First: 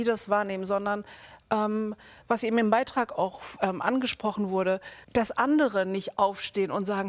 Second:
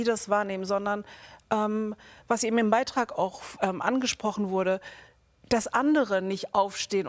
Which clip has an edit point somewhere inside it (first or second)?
first